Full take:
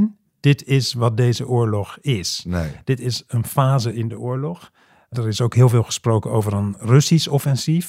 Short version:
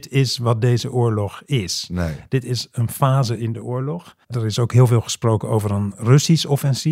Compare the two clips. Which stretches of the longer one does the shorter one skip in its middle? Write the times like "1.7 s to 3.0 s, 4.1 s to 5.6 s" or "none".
4.8 s to 5.1 s

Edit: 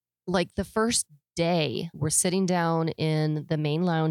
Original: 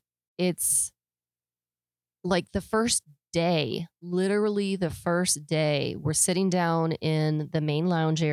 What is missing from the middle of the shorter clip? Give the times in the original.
3.9 s to 6.0 s

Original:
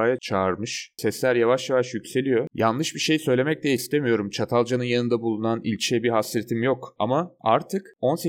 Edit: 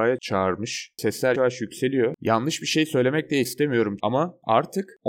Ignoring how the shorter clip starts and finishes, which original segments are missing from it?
1.3 s to 1.7 s, 4.3 s to 7.0 s

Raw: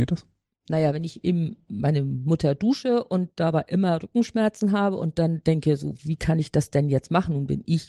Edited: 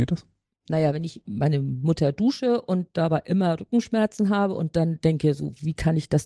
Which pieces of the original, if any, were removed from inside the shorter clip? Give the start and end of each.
1.2 s to 1.6 s

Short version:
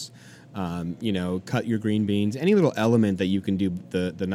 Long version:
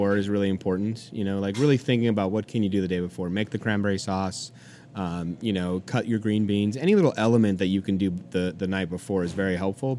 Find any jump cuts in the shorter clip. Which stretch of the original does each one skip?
none

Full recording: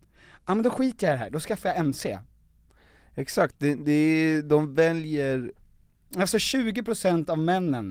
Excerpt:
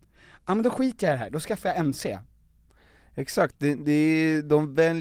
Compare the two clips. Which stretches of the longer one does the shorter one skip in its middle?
none

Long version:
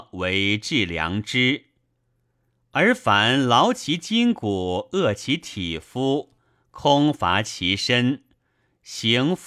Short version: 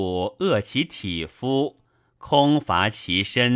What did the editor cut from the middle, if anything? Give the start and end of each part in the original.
none

